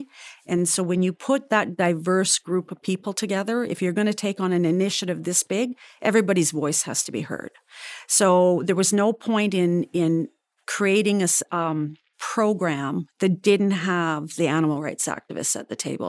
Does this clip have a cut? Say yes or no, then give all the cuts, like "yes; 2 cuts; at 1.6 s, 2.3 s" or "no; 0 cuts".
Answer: no; 0 cuts